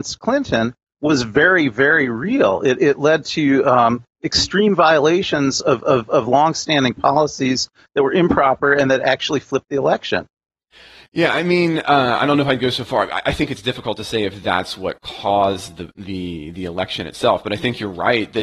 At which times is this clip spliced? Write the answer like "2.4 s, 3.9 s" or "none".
2.8 s